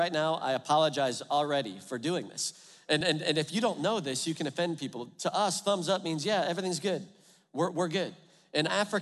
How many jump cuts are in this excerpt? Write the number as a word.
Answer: zero